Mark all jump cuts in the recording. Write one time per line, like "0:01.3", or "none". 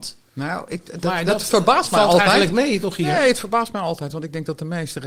none